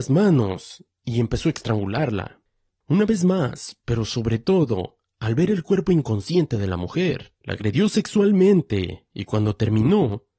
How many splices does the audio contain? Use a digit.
2